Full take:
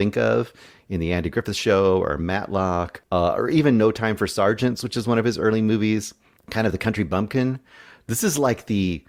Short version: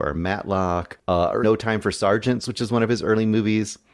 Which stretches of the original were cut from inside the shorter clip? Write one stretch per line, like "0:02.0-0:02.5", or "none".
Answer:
0:03.5-0:03.8